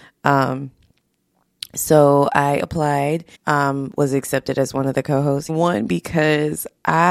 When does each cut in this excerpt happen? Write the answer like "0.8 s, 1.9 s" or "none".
3.3 s, 5.5 s